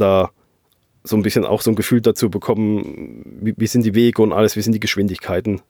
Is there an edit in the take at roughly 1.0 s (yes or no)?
no